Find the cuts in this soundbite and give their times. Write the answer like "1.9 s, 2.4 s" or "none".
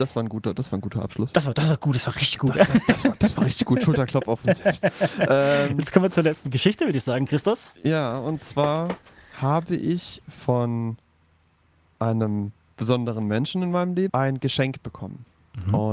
7.8 s, 14.1 s